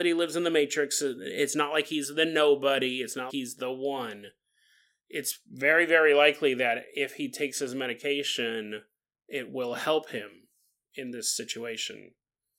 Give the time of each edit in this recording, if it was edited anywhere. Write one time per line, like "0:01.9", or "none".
0:03.3